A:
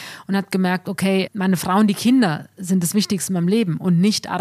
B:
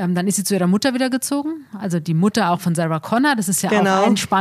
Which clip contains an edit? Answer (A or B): A